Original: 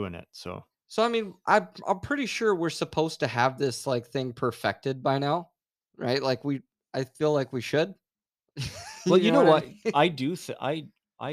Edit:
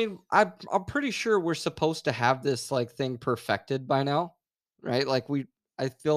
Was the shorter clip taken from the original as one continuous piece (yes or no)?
yes